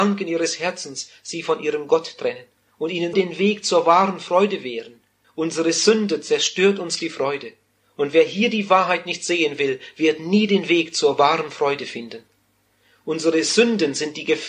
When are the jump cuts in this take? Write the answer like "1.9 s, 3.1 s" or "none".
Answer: 3.1 s, 5.2 s